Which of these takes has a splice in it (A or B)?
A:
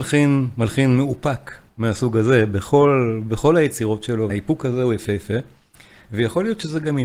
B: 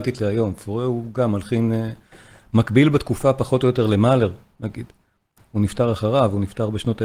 A